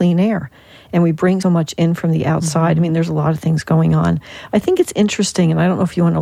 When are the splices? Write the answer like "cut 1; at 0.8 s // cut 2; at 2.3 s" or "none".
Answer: cut 1; at 1.4 s